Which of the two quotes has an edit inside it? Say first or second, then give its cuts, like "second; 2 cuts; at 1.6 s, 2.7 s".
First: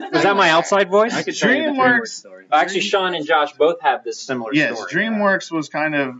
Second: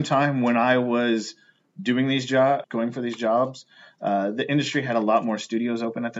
second; 1 cut; at 2.6 s